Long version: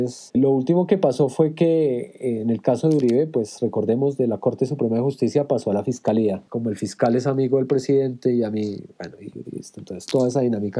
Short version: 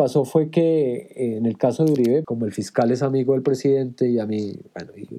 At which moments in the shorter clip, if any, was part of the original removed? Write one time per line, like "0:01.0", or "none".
0:02.2